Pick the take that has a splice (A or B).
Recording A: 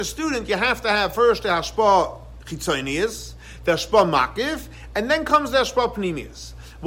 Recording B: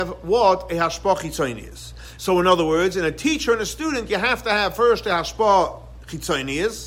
B